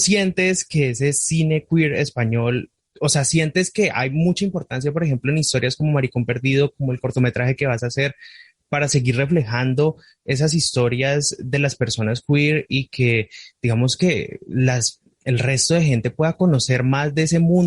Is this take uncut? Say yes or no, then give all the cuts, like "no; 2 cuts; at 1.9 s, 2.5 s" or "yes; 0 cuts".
no; 1 cut; at 2.8 s